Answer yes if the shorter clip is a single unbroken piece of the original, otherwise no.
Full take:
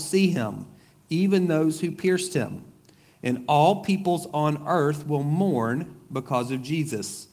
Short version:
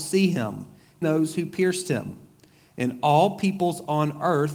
no